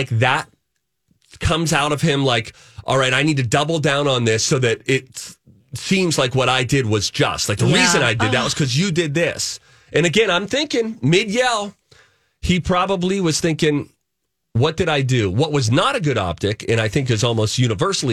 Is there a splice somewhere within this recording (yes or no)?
no